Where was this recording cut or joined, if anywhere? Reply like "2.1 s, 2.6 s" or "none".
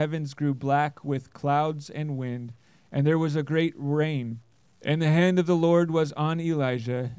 4.7 s